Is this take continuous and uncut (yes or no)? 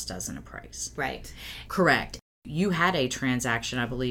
no